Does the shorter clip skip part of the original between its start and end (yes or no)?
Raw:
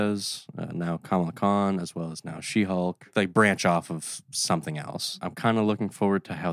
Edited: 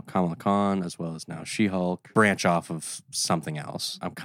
yes